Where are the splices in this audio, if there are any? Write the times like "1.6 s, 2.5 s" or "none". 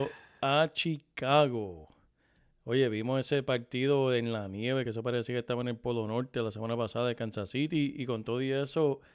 none